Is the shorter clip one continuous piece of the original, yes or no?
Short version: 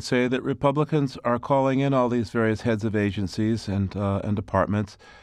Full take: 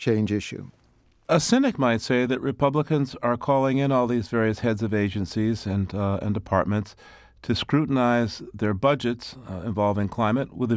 yes